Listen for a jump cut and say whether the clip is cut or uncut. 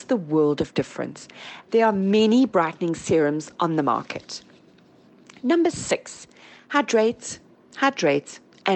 cut